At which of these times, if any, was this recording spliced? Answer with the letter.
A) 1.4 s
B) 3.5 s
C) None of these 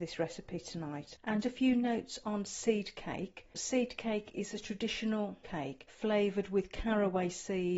A